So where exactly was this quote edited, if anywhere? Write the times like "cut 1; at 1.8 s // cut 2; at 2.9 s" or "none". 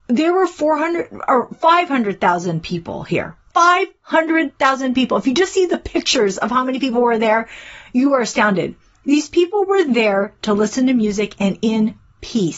none